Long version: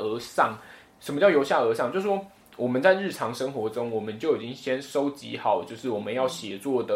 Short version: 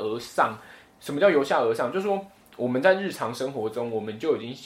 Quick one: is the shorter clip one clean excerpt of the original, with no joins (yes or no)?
yes